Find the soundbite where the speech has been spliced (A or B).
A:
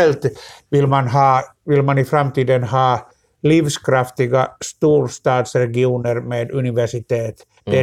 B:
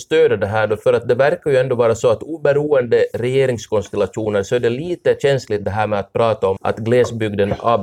B